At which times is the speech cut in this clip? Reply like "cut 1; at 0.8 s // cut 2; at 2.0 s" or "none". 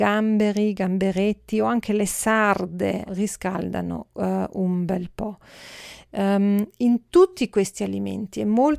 cut 1; at 3.1 s